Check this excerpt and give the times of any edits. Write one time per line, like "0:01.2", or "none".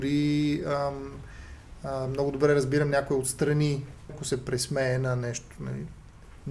0:04.1